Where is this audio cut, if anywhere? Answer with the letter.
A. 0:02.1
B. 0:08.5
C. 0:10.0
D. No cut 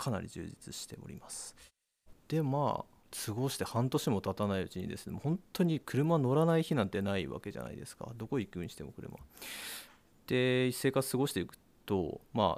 A